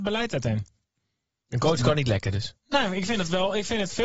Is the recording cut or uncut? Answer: cut